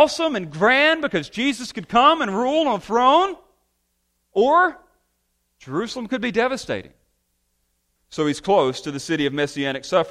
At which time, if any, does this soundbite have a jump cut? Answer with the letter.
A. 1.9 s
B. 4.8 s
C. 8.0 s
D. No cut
C